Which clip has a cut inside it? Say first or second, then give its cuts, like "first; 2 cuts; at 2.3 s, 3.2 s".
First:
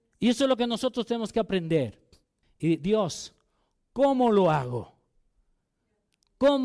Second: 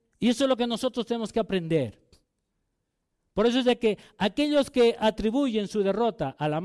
first; 1 cut; at 2.4 s